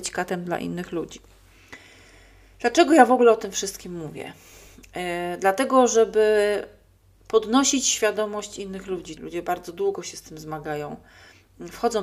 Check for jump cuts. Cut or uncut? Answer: cut